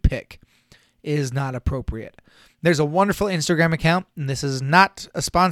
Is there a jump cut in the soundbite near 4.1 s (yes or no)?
no